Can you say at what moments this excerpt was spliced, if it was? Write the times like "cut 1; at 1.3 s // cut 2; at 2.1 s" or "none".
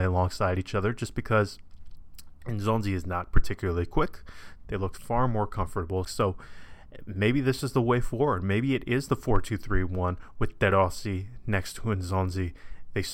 cut 1; at 4.6 s // cut 2; at 6.0 s